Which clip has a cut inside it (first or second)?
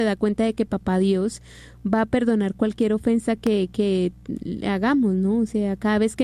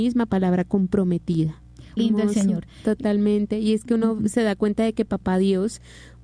second